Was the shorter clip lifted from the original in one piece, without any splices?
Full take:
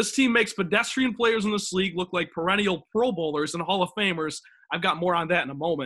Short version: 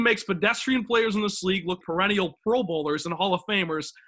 no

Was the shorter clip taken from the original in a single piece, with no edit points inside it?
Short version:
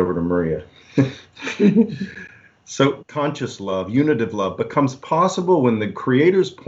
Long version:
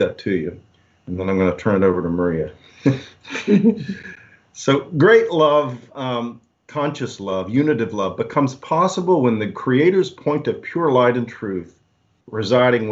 no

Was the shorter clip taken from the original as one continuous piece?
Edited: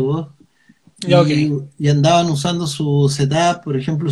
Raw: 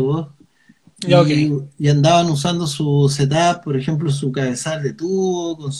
yes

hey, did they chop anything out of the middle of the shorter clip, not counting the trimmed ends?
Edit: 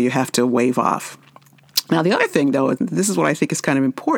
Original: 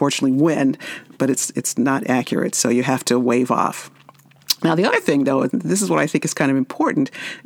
no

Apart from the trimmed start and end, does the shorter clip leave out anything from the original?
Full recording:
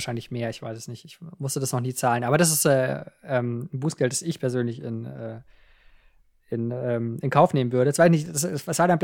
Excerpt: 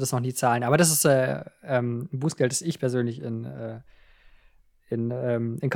no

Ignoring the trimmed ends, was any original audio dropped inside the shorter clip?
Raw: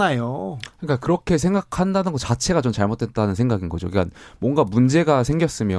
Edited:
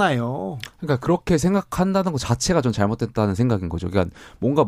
no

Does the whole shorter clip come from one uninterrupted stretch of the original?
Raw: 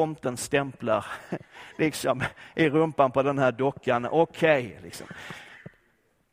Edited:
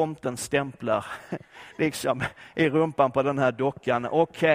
yes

